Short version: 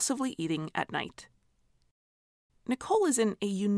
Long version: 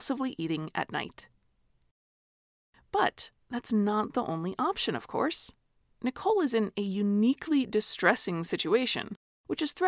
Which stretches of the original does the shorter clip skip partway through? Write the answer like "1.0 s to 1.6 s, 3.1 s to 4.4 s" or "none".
2.5 s to 5.9 s